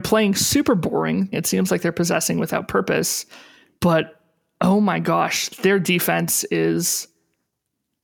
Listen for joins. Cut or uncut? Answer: cut